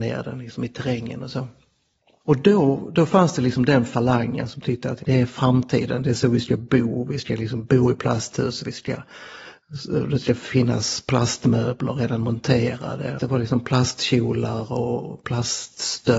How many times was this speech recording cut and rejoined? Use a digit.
2